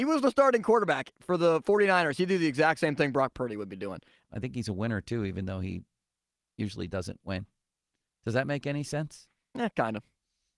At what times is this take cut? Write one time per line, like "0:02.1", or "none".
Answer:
0:04.2